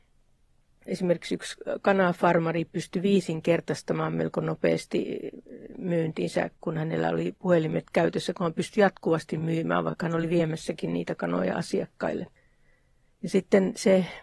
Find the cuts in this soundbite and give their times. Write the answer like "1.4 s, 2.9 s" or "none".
none